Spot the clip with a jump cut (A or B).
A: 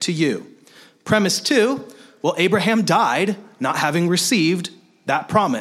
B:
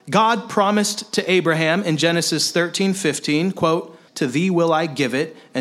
B